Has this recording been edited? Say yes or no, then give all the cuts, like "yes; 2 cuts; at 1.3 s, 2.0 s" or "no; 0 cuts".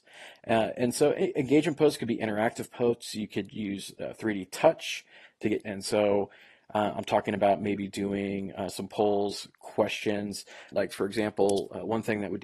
yes; 2 cuts; at 5.6 s, 10.7 s